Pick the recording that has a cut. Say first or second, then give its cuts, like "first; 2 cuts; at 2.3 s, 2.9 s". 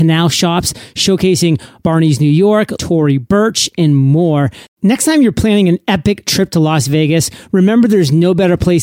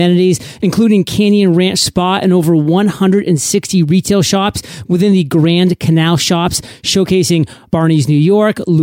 first; 2 cuts; at 2.8 s, 4.7 s